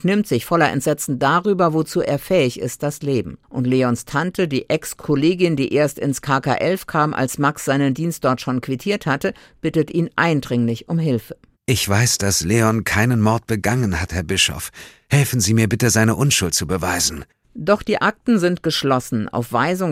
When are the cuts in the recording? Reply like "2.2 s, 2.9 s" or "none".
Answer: 3.4 s